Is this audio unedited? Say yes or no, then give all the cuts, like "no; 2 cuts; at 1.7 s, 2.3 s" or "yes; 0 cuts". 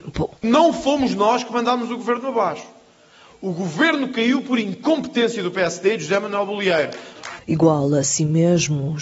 no; 1 cut; at 7.4 s